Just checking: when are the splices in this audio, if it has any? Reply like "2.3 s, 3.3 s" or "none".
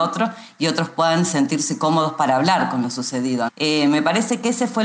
3.5 s